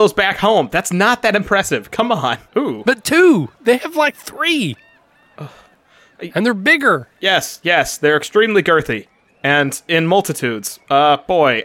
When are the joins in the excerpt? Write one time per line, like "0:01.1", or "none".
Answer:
0:02.5

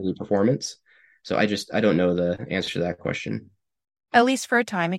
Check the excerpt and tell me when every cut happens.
0:04.0

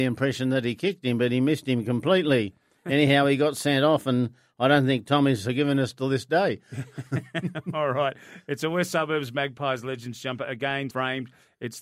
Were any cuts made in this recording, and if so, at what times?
0:10.9

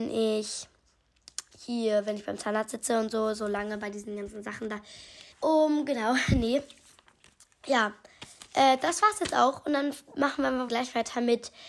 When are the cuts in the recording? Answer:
0:05.3
0:10.7

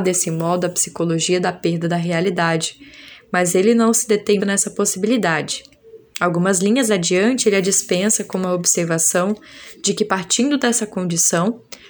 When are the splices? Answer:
0:04.4

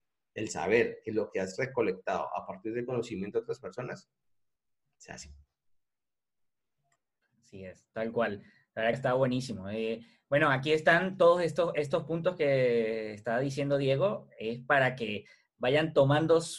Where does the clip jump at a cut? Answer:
0:08.9

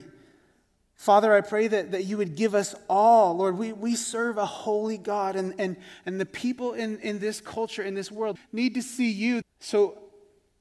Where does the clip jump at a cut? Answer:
0:08.4
0:09.4

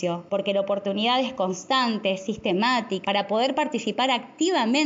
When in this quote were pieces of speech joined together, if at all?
0:03.0

